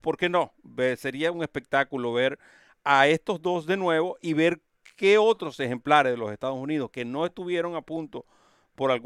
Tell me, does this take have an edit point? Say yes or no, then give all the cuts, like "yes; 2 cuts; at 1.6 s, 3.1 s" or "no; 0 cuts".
no; 0 cuts